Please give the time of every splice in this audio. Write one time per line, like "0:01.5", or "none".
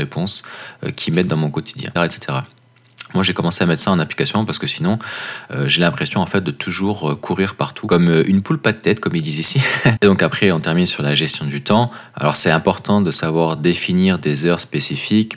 0:02.0
0:10.0